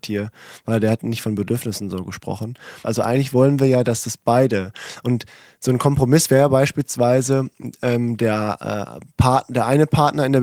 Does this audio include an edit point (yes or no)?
yes